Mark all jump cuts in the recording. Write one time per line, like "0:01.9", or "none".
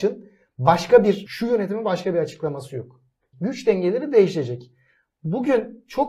0:01.3
0:03.3